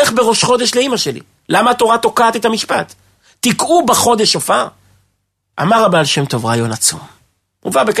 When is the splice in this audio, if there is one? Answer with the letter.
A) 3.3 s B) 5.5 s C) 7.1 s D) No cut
B